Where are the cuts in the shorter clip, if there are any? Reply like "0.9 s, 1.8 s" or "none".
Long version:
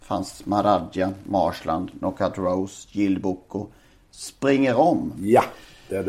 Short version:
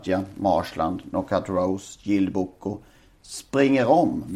none